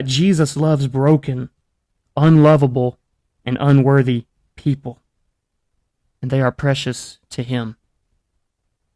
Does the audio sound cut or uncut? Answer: uncut